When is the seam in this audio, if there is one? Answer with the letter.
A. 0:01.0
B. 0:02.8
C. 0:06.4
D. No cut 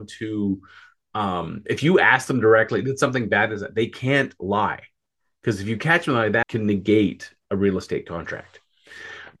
C